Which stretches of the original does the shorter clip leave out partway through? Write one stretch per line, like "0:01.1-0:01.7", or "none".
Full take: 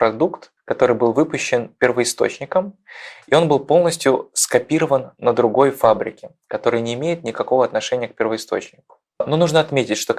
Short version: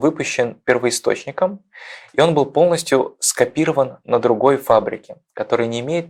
none